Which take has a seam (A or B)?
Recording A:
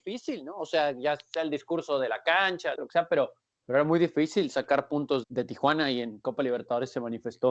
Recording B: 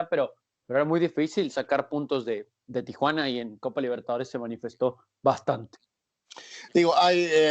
A